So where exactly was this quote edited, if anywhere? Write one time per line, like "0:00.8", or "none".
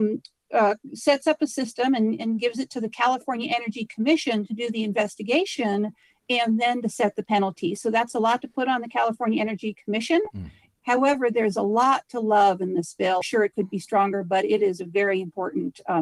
0:10.8
0:13.2